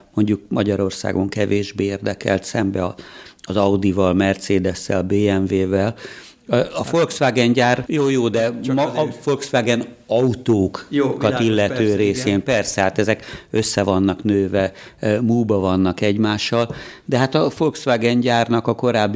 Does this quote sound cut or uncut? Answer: cut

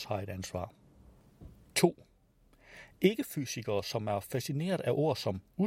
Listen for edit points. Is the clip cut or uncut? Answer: uncut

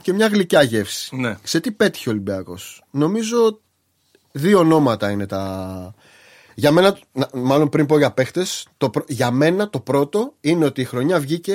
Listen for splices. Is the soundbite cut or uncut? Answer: uncut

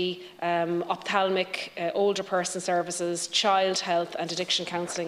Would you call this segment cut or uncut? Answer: uncut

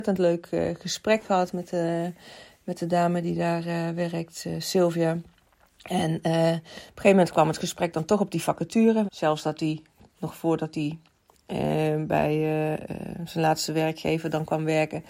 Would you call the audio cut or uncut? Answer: cut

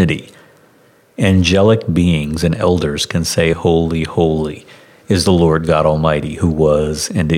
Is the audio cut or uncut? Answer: cut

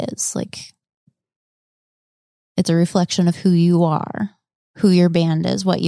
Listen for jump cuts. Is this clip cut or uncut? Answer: uncut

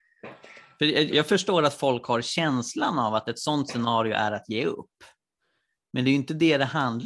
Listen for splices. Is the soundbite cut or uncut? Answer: cut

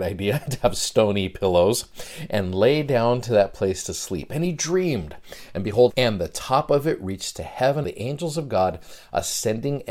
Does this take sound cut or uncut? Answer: cut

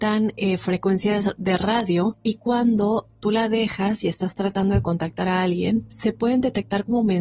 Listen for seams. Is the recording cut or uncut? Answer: uncut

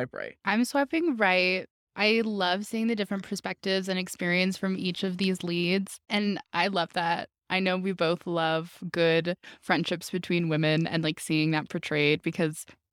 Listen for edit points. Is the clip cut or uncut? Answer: cut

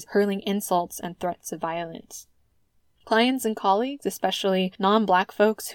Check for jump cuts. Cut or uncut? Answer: cut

